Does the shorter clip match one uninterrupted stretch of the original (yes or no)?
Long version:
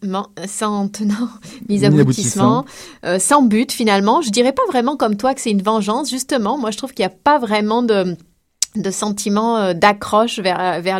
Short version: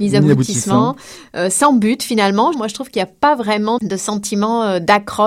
no